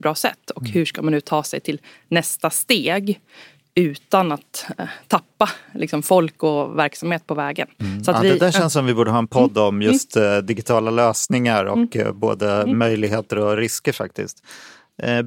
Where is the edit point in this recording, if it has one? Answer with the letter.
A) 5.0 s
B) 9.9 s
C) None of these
C